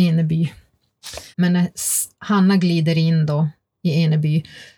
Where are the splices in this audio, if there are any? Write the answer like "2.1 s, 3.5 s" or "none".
1.3 s